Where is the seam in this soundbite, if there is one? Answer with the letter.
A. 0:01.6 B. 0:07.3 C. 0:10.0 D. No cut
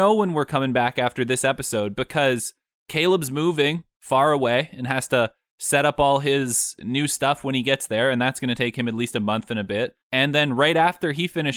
C